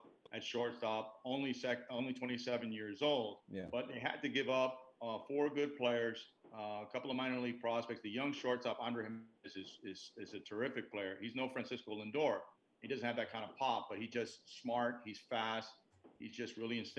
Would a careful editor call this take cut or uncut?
uncut